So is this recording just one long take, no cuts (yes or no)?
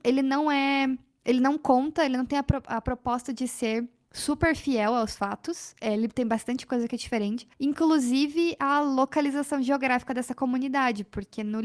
yes